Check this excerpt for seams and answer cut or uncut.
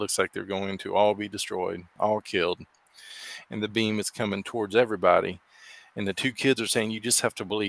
uncut